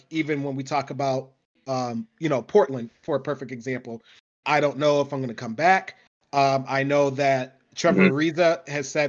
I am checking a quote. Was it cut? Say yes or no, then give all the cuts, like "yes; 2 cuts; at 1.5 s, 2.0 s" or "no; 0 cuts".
yes; 1 cut; at 4.4 s